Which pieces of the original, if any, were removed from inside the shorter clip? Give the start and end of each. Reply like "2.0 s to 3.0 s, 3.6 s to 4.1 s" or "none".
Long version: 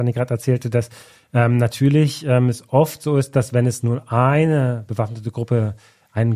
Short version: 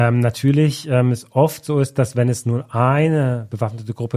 none